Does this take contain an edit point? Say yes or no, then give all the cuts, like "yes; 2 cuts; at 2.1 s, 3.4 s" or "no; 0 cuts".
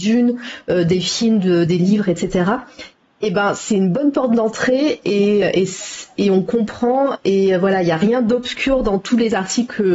no; 0 cuts